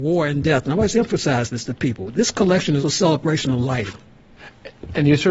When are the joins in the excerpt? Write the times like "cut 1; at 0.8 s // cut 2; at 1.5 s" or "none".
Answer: cut 1; at 2.8 s

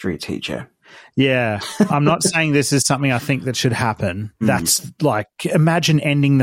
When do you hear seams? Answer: cut 1; at 1.9 s // cut 2; at 4.4 s

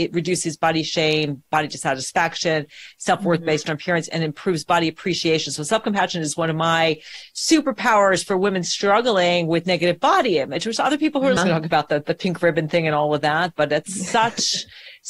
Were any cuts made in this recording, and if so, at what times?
cut 1; at 11.4 s

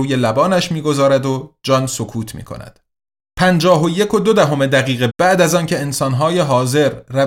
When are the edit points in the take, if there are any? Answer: cut 1; at 5.1 s

